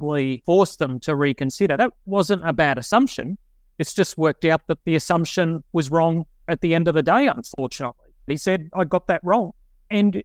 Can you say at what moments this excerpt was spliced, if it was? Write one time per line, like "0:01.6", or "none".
0:08.3